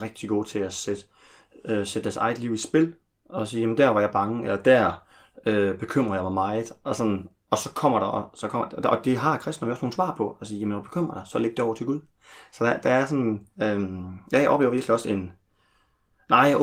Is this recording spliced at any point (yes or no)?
yes